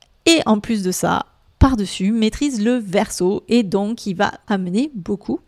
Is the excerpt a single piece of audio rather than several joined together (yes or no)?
no